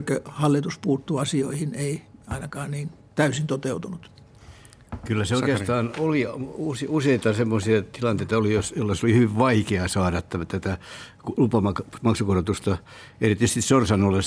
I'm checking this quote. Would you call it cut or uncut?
uncut